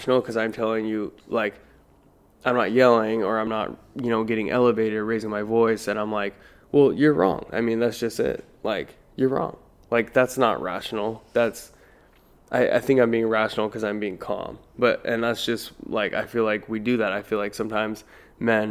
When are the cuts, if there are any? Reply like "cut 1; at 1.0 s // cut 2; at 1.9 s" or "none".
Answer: none